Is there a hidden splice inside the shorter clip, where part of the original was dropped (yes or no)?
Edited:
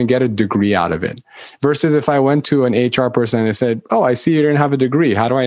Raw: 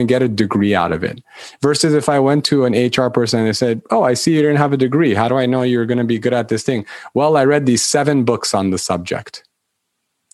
no